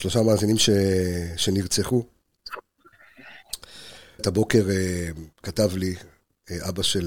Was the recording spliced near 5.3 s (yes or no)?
yes